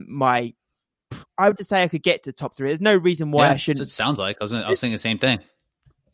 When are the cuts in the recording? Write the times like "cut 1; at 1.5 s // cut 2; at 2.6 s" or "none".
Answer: cut 1; at 1.6 s